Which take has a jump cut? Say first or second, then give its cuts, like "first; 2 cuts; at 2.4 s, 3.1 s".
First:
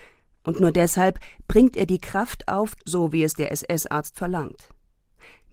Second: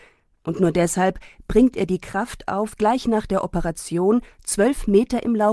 first; 1 cut; at 2.8 s